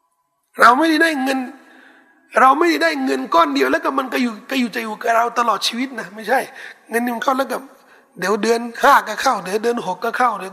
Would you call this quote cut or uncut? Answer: uncut